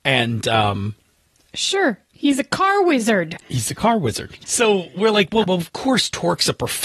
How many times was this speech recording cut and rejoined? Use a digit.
2